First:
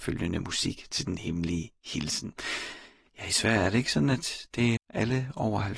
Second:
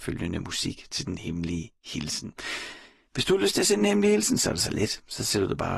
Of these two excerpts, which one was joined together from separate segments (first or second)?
first